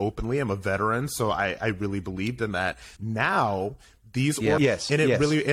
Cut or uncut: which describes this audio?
cut